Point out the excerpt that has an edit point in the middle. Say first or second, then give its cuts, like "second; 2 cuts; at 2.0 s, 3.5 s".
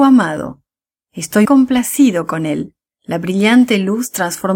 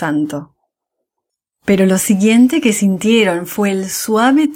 first; 2 cuts; at 1.4 s, 2.9 s